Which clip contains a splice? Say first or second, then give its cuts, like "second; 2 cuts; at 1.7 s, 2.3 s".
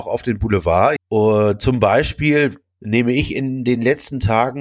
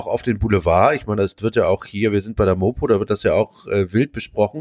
first; 2 cuts; at 1.0 s, 2.6 s